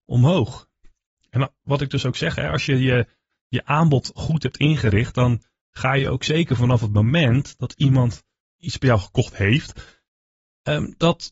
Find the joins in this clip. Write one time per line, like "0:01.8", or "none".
none